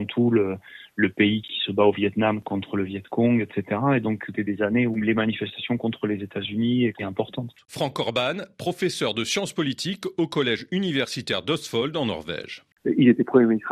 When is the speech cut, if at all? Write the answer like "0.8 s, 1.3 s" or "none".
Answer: 4.3 s, 7.6 s

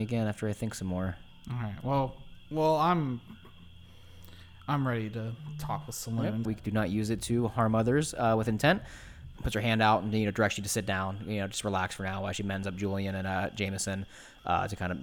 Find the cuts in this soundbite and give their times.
6.4 s, 9.4 s

